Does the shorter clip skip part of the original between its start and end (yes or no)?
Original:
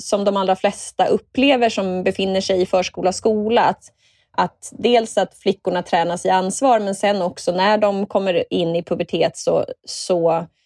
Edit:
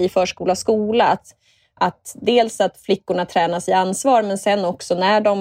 no